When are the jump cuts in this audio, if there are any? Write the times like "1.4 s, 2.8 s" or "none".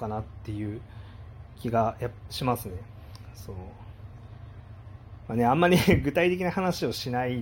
none